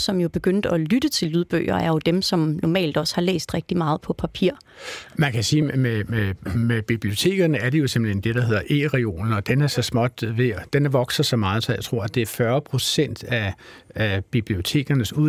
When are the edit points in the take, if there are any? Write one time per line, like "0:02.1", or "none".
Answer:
none